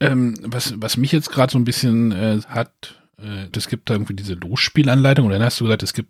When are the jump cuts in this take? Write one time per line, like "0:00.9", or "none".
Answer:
0:02.4
0:03.5